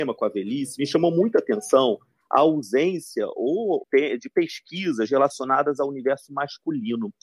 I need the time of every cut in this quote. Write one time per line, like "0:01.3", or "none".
0:03.8